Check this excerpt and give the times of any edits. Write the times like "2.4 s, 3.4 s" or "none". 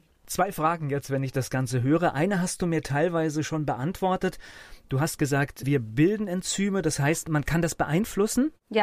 none